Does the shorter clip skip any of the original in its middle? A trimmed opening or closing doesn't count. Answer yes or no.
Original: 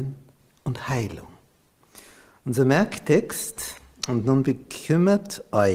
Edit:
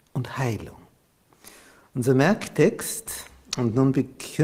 no